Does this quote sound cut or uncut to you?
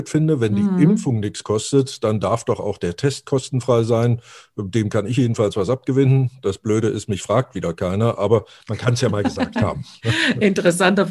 uncut